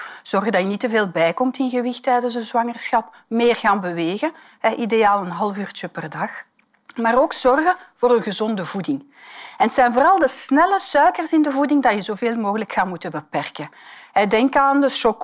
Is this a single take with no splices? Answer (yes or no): yes